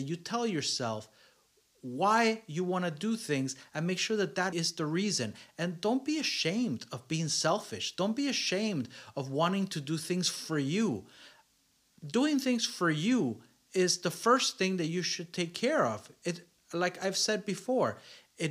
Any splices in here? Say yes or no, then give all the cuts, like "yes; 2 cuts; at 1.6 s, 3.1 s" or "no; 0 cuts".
yes; 1 cut; at 4.5 s